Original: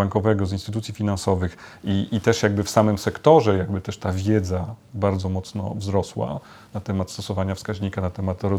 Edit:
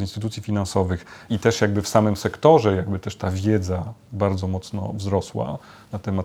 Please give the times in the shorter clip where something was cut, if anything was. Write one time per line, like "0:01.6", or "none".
0:01.3